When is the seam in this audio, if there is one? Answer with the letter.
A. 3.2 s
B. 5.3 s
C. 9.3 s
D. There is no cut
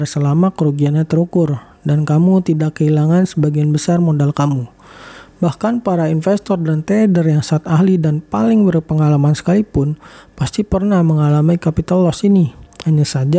D